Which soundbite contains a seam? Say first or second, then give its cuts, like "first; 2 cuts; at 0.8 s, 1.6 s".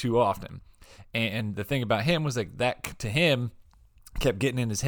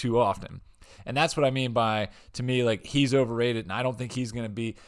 first; 1 cut; at 1.0 s